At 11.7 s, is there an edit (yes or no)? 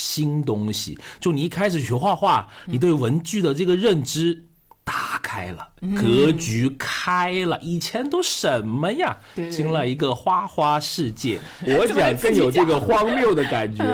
yes